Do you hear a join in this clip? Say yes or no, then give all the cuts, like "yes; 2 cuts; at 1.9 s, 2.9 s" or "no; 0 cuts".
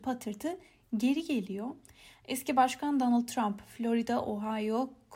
no; 0 cuts